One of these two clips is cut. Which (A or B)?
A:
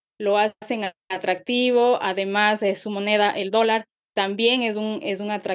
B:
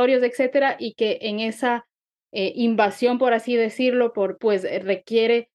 B